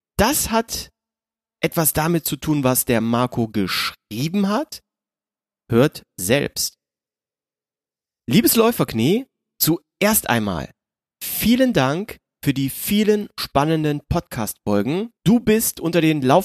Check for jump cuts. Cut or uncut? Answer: cut